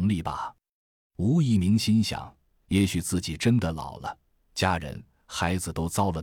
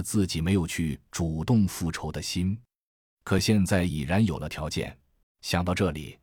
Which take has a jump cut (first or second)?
second